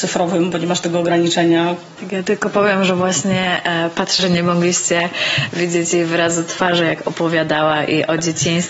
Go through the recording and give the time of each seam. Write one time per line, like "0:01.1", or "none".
0:02.0
0:04.2